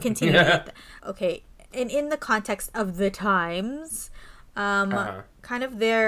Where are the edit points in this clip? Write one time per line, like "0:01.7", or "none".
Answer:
0:01.0